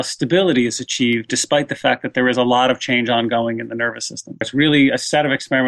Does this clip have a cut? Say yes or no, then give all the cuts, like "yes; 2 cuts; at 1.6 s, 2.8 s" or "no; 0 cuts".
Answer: yes; 1 cut; at 4.4 s